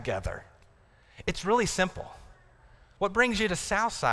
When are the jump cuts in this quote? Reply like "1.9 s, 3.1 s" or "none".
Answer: 3.0 s

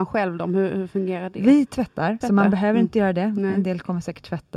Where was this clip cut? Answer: 2.2 s

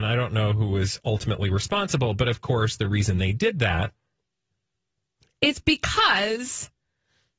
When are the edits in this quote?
none

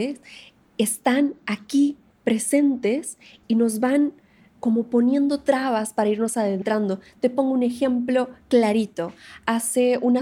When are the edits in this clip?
none

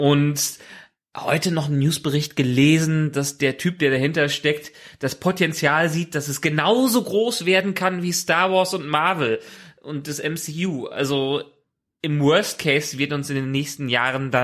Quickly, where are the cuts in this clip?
none

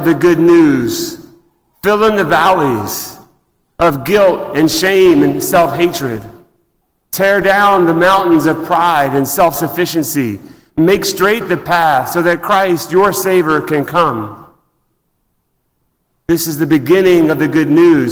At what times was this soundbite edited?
1.7 s

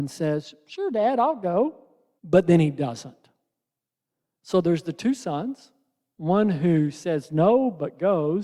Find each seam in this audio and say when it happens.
2.2 s

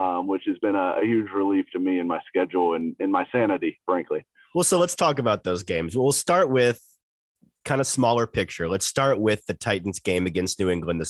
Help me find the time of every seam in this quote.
none

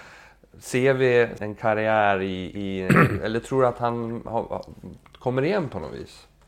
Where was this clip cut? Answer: 1.4 s

